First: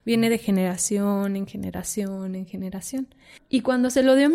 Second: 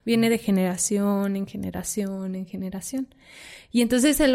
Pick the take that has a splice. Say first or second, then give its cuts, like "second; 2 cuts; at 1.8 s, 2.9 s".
first; 1 cut; at 3.4 s